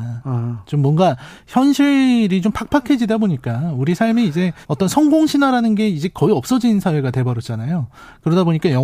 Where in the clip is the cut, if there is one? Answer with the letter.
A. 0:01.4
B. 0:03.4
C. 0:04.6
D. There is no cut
C